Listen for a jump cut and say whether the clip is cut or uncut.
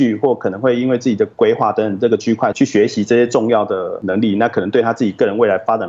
cut